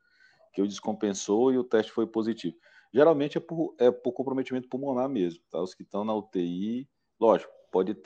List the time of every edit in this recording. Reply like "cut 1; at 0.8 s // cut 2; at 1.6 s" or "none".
none